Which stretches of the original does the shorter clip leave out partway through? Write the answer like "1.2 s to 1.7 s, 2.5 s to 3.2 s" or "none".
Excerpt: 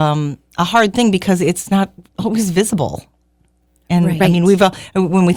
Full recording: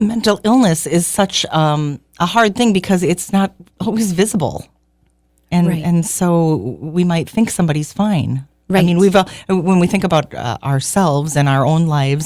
5.8 s to 8.7 s